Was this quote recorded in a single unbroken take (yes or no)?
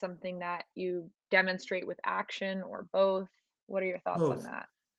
yes